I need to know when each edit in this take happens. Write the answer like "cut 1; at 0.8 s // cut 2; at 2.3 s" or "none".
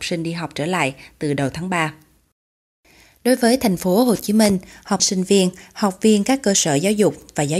cut 1; at 5.0 s

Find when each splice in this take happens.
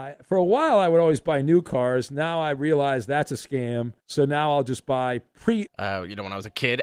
cut 1; at 4.0 s // cut 2; at 5.7 s

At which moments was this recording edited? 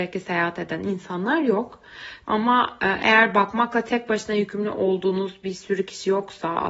cut 1; at 2.2 s

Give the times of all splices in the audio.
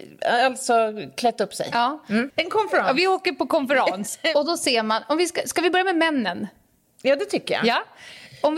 cut 1; at 2.3 s

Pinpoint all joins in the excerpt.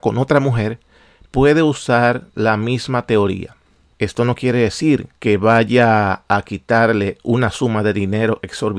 cut 1; at 3.9 s // cut 2; at 5.2 s

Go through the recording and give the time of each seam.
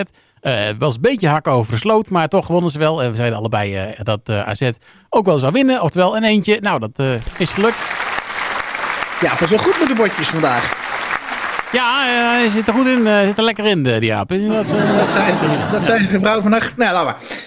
none

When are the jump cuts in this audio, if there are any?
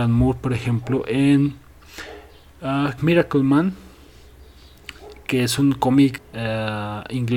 cut 1; at 3.0 s // cut 2; at 6.2 s

